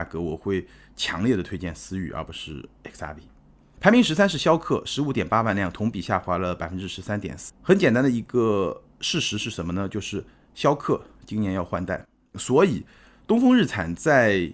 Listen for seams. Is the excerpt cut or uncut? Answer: cut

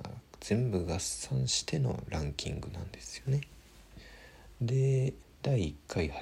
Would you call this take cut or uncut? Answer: cut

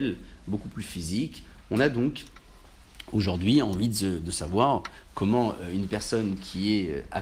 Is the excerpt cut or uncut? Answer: cut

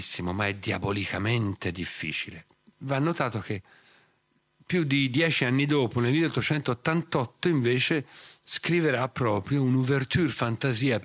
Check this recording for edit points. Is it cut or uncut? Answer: uncut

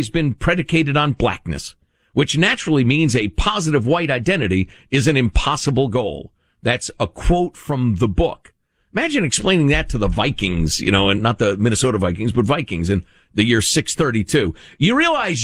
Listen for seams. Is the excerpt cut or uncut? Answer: uncut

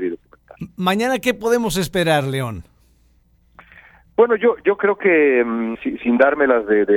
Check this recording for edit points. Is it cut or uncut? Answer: cut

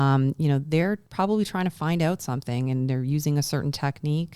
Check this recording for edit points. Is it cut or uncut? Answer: uncut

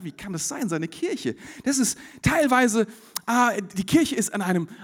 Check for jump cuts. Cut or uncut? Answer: uncut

